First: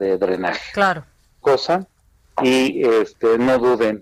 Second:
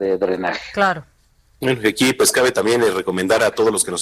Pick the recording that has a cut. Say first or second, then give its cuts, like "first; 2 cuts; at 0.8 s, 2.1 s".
first; 1 cut; at 1.4 s